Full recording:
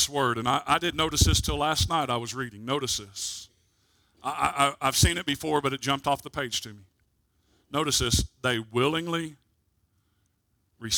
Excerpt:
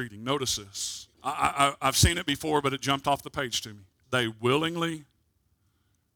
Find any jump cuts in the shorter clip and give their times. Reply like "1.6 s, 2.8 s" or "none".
1.1 s, 4.0 s